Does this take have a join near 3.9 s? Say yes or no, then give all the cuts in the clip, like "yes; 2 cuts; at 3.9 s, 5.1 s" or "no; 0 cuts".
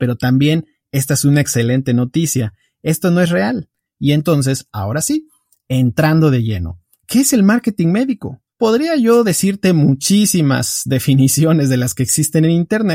yes; 2 cuts; at 3.9 s, 8.5 s